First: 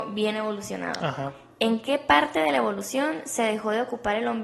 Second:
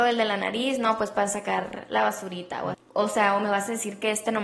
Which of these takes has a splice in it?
second; 1 cut; at 2.7 s

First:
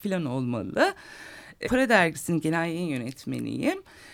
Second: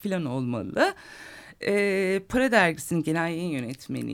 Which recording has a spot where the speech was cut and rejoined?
first; 1 cut; at 1.6 s

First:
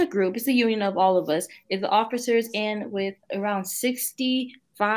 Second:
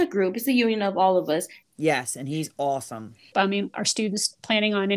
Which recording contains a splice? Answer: second; 2 cuts; at 1.6 s, 3.3 s

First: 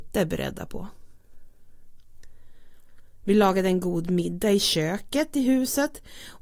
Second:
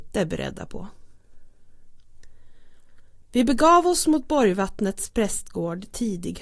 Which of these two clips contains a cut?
first; 1 cut; at 3.2 s

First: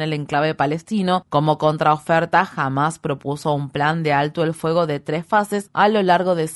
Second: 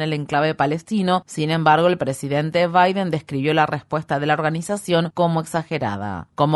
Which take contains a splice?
first; 1 cut; at 1.2 s

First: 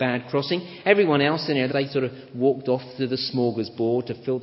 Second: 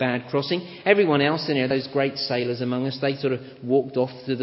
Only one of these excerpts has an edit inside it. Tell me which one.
first; 1 cut; at 1.7 s

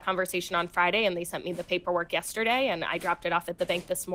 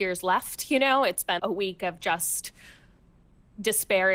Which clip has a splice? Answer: second; 1 cut; at 1.4 s

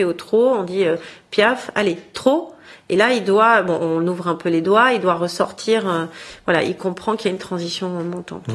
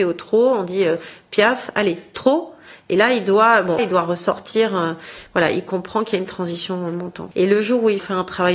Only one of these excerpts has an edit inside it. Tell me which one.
second; 2 cuts; at 3.8 s, 7.3 s

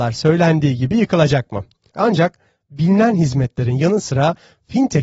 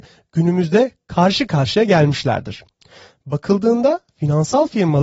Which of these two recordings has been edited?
first; 1 cut; at 1.9 s

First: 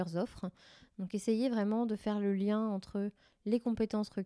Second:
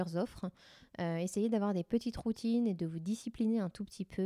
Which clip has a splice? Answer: second; 1 cut; at 0.9 s

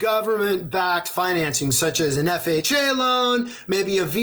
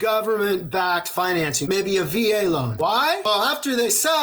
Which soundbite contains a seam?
second; 2 cuts; at 1.6 s, 2.8 s

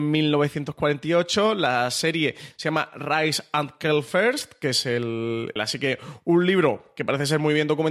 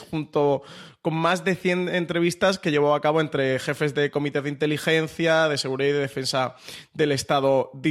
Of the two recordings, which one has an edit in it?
first; 1 cut; at 5.6 s

